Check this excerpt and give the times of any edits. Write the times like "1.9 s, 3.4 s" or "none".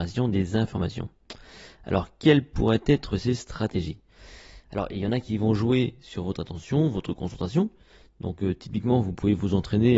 none